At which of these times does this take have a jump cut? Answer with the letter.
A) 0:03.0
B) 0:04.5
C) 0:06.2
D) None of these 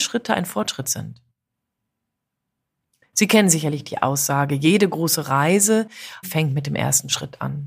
C